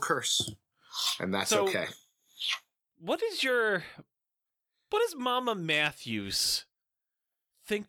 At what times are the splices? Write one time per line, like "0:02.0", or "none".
none